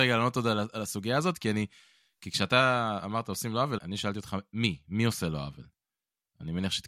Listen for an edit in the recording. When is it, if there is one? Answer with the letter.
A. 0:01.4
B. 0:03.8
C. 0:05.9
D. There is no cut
B